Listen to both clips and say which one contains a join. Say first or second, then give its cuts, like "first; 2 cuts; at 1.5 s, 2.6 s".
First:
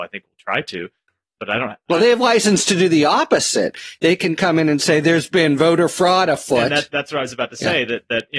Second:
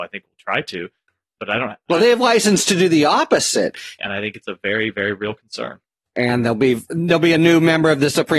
second; 1 cut; at 4.0 s